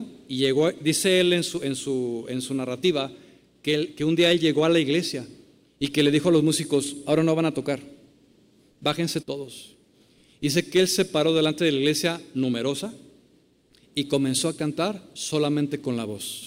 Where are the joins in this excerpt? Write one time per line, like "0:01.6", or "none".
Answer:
0:09.2